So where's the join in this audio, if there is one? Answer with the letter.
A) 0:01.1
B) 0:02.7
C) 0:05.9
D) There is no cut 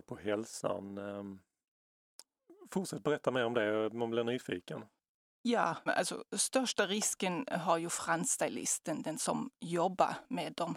C